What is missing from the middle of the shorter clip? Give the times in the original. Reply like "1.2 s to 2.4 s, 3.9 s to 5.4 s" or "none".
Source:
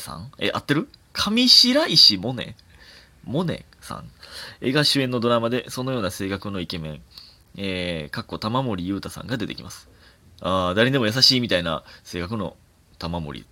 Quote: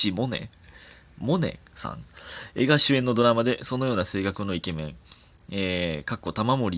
none